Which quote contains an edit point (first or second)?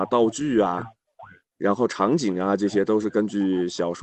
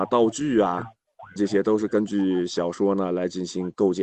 second